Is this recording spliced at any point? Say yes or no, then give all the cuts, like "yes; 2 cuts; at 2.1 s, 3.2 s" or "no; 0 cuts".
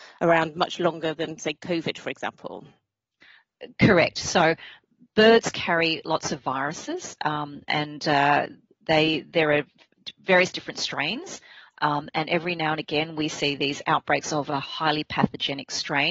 no; 0 cuts